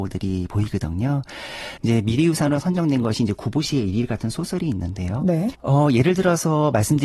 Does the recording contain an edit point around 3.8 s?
no; 2 cuts; at 1.8 s, 5.5 s

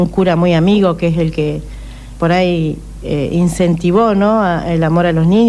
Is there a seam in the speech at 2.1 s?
yes; 1 cut; at 2.1 s

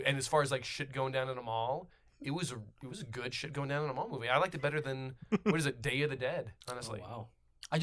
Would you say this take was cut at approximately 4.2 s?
no; 1 cut; at 6.6 s

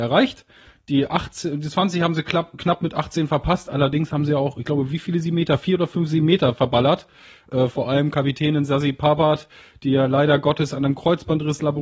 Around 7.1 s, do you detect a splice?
no; 0 cuts

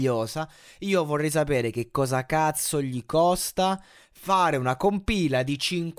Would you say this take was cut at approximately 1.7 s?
no; 0 cuts

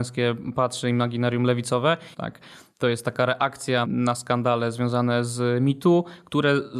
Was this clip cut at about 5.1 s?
no; 2 cuts; at 2.1 s, 3.8 s

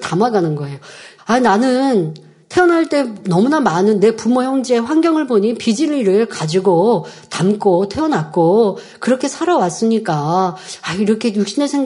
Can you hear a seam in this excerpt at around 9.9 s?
no; 1 cut; at 1.2 s

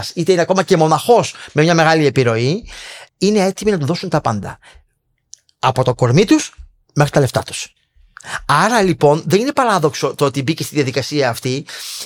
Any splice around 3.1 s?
yes; 1 cut; at 3.1 s

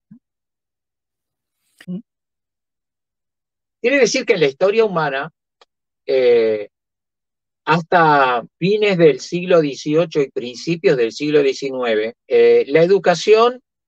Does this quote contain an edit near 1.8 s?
yes; 3 cuts; at 1.8 s, 8.5 s, 12.2 s

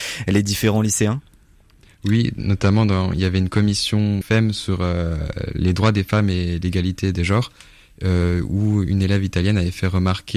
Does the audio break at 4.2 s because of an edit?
yes; 1 cut; at 4.2 s

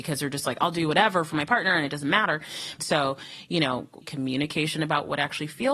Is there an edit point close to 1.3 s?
no; 2 cuts; at 2.8 s, 4.0 s

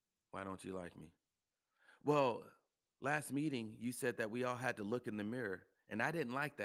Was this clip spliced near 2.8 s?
no; 0 cuts

